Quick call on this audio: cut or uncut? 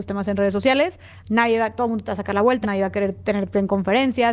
cut